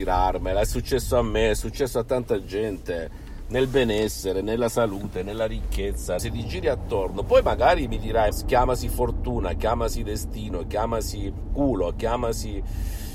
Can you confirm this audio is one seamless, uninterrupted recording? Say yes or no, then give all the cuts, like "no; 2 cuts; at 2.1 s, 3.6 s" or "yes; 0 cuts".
no; 2 cuts; at 6.2 s, 8.3 s